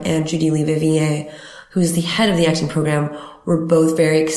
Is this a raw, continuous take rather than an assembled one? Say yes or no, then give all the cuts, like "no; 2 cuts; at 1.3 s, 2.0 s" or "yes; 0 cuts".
yes; 0 cuts